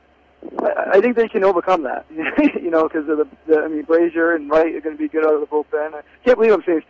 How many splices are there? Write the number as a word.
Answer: zero